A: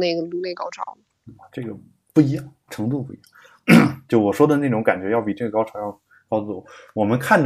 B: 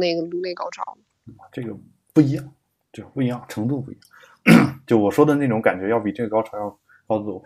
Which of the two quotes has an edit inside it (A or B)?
A